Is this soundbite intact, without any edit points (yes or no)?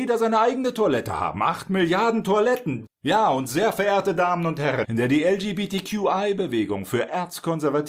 no